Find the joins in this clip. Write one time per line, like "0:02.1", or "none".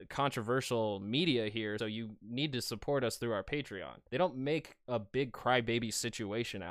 0:01.8
0:04.1